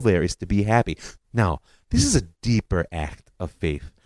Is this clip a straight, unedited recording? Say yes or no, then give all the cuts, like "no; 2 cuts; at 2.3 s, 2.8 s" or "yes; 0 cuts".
no; 1 cut; at 1.1 s